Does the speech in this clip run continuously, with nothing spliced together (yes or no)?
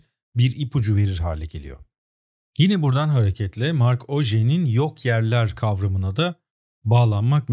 yes